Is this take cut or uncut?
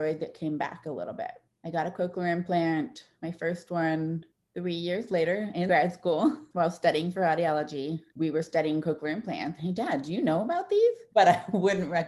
cut